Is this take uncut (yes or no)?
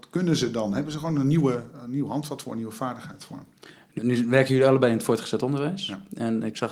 no